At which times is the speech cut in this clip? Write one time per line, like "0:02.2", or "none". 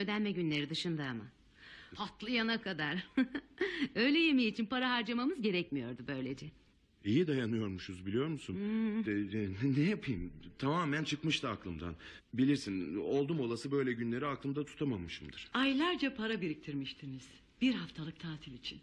0:01.9
0:09.1
0:15.5